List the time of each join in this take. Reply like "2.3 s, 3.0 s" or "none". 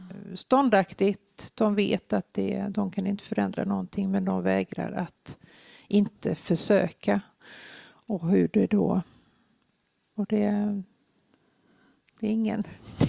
10.2 s